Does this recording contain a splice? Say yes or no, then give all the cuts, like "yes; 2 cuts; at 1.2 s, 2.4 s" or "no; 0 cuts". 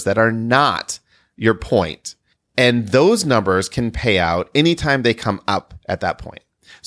no; 0 cuts